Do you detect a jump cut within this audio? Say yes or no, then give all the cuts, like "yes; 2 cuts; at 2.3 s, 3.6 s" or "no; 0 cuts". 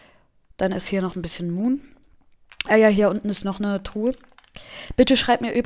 no; 0 cuts